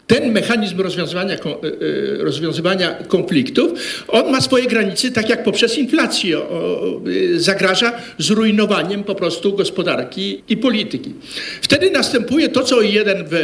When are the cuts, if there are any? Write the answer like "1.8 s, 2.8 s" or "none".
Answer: 10.4 s